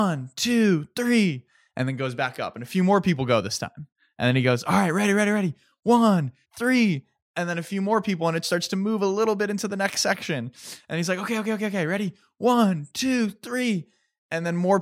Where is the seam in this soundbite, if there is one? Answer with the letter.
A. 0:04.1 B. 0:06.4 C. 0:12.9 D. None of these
B